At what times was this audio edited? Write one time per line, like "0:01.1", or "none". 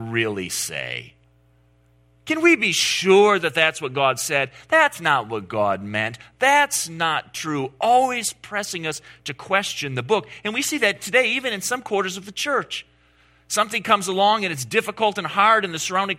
none

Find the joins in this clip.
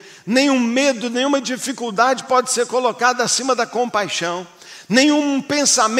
none

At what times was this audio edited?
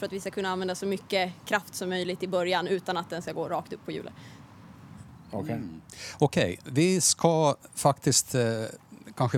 none

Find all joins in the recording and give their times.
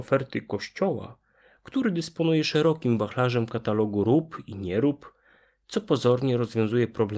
none

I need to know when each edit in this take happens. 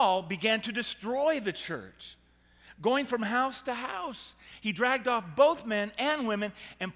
none

